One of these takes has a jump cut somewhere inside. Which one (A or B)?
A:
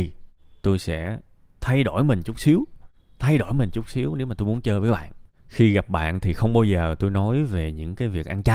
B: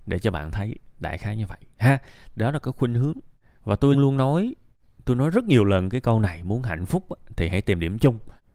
B